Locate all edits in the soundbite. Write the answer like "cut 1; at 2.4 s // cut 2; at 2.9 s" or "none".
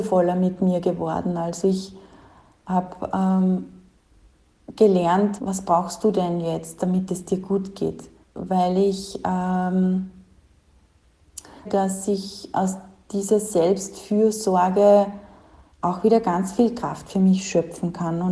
cut 1; at 5.4 s // cut 2; at 8.2 s // cut 3; at 11.6 s